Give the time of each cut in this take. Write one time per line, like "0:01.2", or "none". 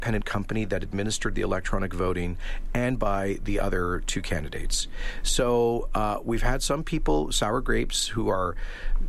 none